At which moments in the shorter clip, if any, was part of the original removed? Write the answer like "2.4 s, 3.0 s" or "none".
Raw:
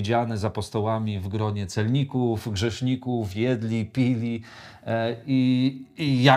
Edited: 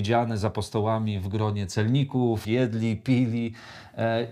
2.4 s